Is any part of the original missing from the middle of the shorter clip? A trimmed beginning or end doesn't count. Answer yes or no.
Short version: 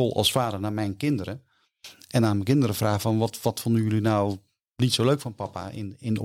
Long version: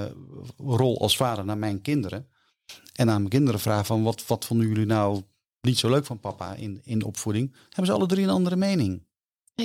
no